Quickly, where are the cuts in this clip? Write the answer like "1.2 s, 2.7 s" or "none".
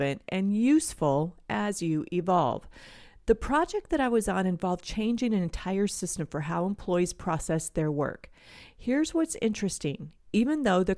none